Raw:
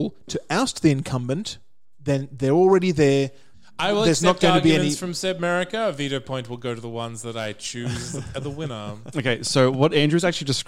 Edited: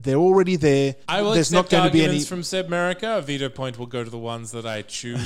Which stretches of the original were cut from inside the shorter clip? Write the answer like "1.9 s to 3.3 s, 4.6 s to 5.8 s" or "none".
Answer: 3.4 s to 3.7 s

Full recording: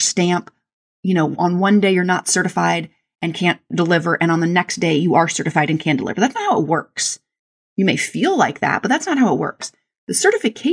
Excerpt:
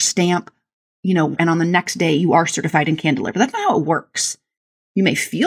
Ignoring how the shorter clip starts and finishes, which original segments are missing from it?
1.4 s to 4.2 s

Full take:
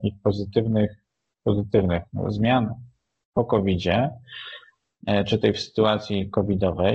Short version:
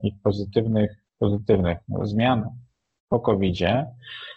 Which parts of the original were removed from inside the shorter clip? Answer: 1.1 s to 1.3 s

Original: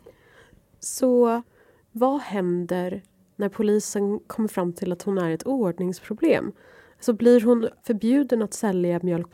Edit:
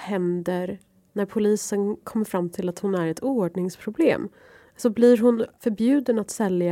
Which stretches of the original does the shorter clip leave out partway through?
none

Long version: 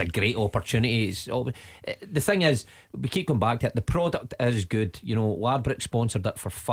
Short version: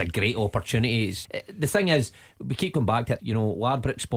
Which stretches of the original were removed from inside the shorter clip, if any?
1.2 s to 1.8 s, 3.7 s to 5.0 s

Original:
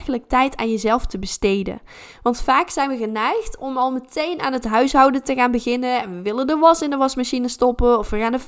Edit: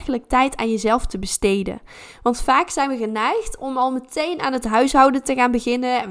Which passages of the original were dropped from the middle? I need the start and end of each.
none

